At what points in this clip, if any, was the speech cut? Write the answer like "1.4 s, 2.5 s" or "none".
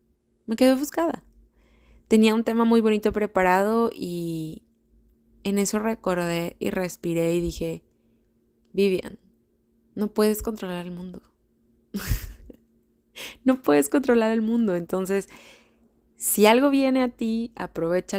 none